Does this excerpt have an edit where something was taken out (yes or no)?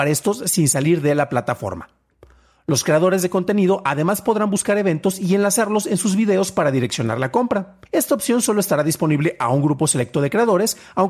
yes